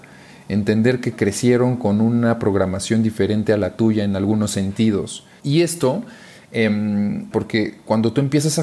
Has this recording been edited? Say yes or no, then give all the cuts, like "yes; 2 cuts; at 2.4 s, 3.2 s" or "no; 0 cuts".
yes; 2 cuts; at 5.4 s, 7.3 s